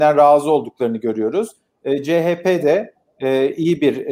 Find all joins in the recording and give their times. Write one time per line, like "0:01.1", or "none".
none